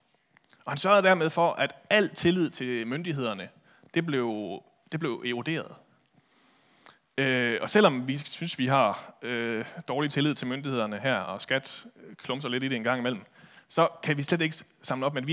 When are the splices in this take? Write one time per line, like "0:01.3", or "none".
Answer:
none

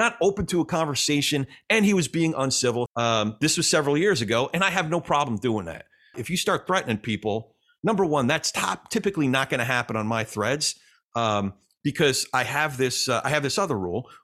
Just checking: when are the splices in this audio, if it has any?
0:02.9
0:06.1

